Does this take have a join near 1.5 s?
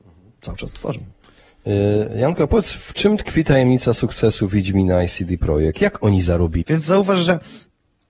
no; 1 cut; at 6.6 s

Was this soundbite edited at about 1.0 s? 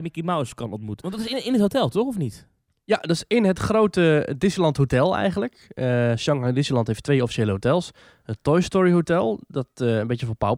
yes; 1 cut; at 1.0 s

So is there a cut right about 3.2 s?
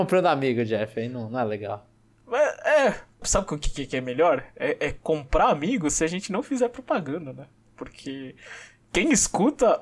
yes; 2 cuts; at 3.2 s, 8.8 s

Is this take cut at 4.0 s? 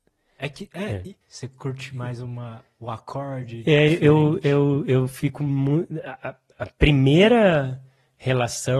no; 1 cut; at 1.2 s

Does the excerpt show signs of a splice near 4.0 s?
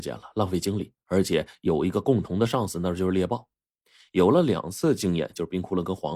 yes; 1 cut; at 4.0 s

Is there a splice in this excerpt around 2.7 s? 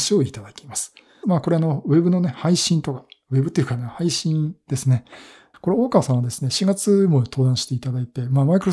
no; 2 cuts; at 1.2 s, 5.5 s

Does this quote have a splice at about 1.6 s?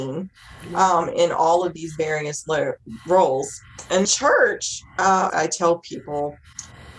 no; 2 cuts; at 4.0 s, 5.3 s

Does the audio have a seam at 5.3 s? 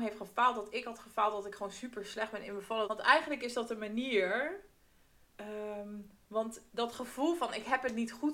no; 1 cut; at 2.8 s

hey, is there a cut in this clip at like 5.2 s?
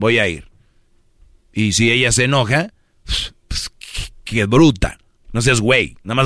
yes; 1 cut; at 5.2 s

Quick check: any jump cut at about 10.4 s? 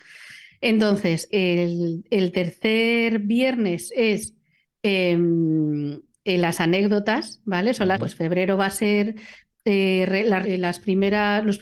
yes; 3 cuts; at 1.3 s, 7.9 s, 10.4 s

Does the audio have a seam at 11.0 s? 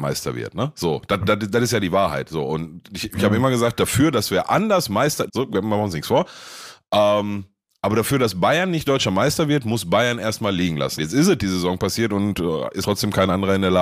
yes; 3 cuts; at 5.3 s, 11.0 s, 12.8 s

